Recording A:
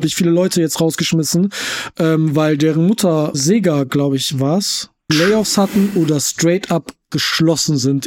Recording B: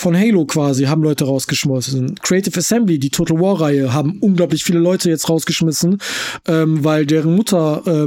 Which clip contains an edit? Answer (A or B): A